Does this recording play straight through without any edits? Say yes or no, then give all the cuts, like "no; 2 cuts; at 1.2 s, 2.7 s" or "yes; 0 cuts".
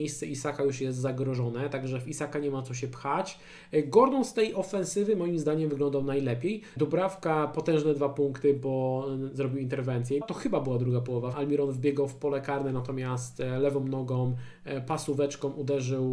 no; 3 cuts; at 6.8 s, 10.2 s, 11.3 s